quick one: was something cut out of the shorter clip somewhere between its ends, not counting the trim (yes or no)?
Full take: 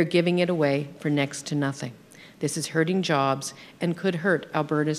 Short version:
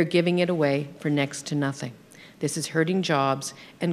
no